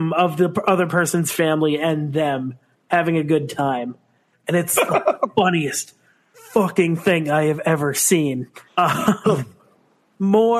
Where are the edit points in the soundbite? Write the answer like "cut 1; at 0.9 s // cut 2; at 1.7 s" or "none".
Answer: cut 1; at 4.3 s // cut 2; at 8.7 s

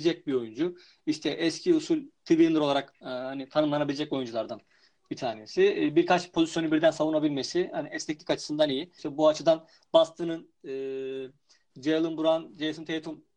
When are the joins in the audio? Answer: cut 1; at 9.0 s

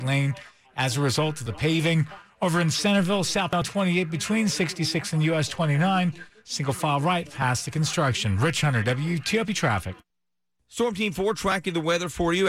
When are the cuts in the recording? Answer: none

